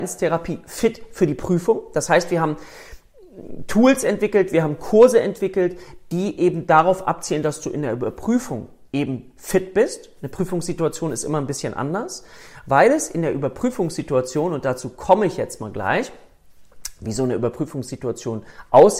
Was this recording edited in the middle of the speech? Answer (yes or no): no